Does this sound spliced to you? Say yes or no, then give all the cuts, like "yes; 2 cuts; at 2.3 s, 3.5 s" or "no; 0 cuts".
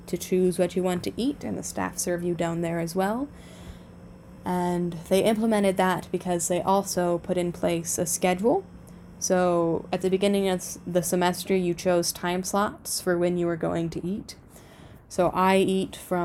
no; 0 cuts